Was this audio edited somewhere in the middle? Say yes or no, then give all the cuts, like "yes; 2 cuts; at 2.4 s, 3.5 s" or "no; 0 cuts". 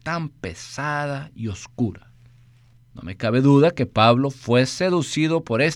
yes; 1 cut; at 2.8 s